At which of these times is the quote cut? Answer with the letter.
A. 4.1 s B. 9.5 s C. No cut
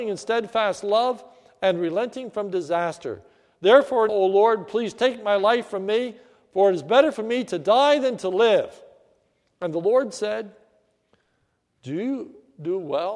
A